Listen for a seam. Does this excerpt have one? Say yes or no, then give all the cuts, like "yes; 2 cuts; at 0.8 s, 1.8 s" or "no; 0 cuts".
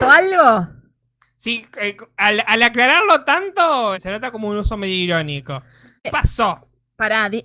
yes; 2 cuts; at 3.9 s, 6.0 s